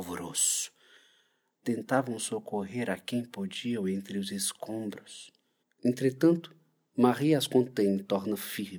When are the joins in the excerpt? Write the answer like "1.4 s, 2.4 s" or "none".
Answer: 1.5 s, 5.6 s

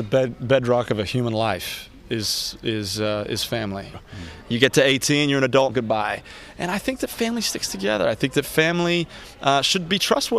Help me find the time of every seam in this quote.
3.9 s, 5.7 s

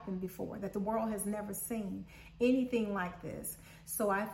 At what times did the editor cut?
none

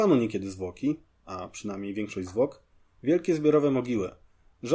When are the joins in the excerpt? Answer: none

